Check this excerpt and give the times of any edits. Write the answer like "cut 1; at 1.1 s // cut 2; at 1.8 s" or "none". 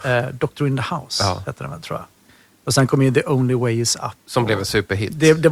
none